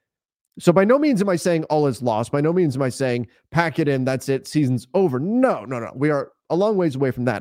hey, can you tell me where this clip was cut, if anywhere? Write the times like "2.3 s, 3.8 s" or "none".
none